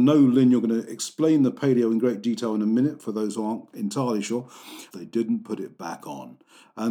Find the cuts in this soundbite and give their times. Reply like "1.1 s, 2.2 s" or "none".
4.9 s